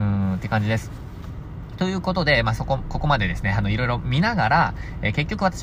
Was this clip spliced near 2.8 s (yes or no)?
no